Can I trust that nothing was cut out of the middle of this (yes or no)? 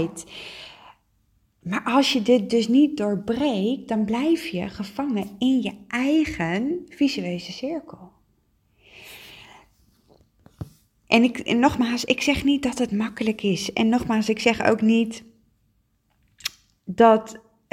yes